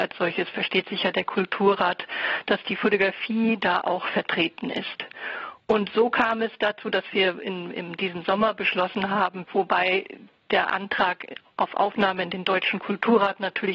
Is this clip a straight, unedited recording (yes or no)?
no